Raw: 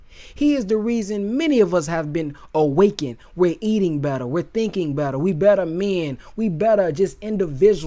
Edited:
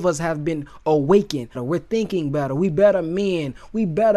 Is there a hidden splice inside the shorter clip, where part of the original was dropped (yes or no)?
yes